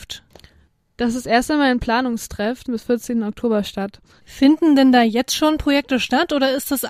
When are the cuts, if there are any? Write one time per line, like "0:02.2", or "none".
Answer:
0:02.6
0:04.2